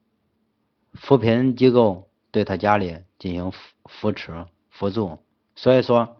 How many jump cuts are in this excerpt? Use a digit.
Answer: 1